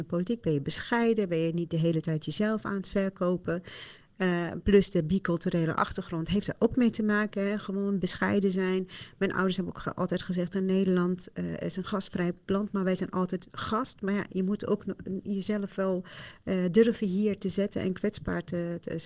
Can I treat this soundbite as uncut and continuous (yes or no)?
yes